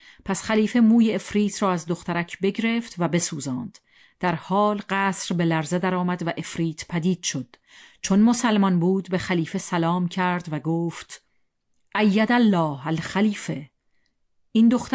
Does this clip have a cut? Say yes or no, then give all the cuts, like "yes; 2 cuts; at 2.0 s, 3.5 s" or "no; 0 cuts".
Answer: no; 0 cuts